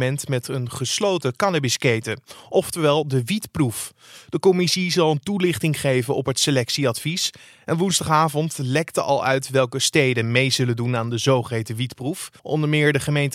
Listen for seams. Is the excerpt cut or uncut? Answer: cut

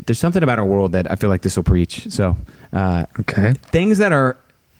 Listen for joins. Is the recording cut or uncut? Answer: uncut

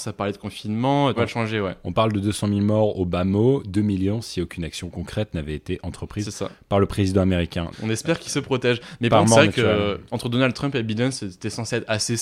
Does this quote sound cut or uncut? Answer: cut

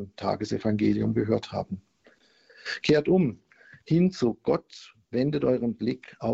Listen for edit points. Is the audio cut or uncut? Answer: uncut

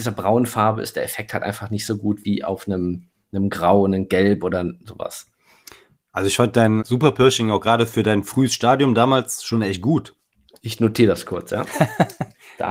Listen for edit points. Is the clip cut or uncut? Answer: cut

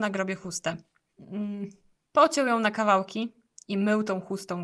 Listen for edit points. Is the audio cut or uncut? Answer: cut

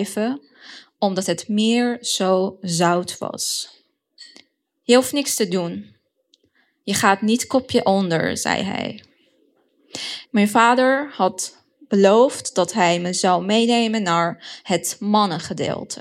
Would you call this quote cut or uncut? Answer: cut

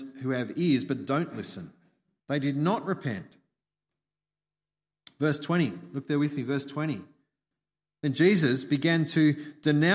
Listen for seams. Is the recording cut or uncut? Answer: cut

